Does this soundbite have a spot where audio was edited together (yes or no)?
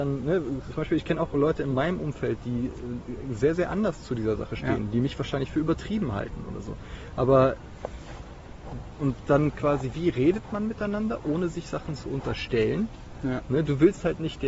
no